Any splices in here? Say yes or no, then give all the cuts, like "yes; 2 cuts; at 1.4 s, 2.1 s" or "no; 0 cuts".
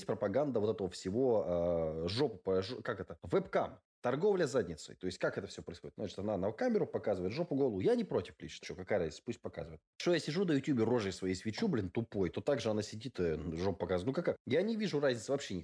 yes; 1 cut; at 8.6 s